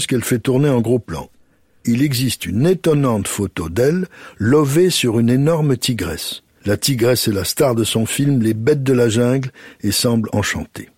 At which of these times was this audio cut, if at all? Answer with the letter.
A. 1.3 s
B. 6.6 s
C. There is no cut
B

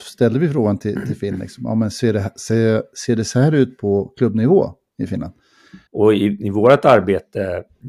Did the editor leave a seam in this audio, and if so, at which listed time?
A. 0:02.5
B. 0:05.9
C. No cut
B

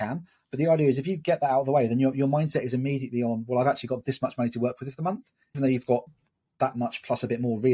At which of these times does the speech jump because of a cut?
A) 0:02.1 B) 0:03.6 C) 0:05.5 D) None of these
C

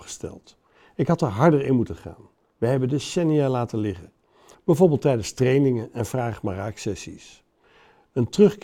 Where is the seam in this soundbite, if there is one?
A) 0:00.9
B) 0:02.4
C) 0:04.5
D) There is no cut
C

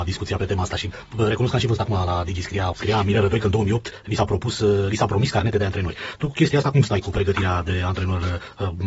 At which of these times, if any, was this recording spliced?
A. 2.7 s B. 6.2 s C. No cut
A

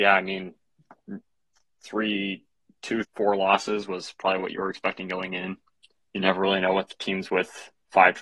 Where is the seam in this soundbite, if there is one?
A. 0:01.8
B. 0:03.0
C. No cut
B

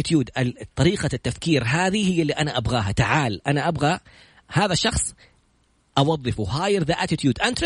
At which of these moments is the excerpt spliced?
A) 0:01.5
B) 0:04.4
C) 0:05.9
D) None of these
D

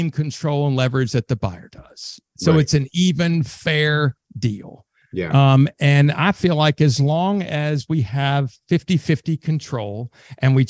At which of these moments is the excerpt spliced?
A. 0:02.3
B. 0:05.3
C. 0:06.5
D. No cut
D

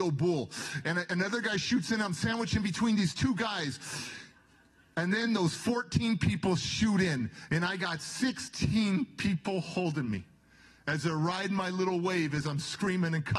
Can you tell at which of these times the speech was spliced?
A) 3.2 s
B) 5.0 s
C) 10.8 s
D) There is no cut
D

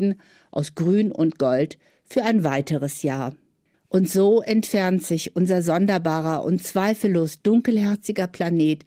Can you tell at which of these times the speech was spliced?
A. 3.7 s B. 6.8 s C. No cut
A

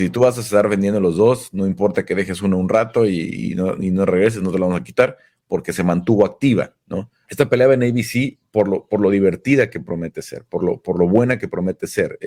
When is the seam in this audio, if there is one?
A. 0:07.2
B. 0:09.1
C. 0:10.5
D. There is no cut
A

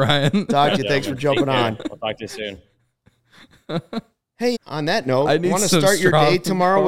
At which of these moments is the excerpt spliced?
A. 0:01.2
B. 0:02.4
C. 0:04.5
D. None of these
C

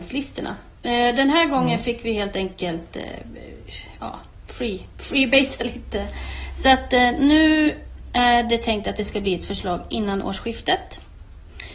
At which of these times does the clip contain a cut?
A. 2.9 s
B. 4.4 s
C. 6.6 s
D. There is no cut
D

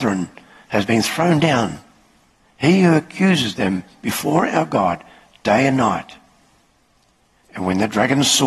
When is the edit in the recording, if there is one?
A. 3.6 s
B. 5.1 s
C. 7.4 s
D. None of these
C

